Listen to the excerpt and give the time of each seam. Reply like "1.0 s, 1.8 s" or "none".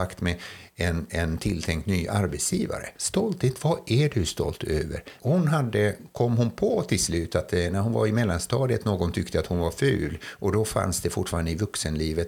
2.9 s, 5.2 s